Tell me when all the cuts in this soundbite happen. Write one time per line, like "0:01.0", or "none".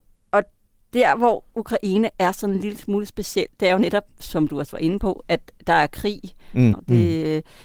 0:06.7